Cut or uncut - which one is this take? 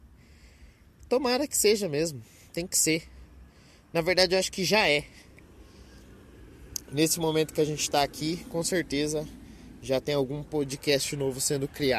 uncut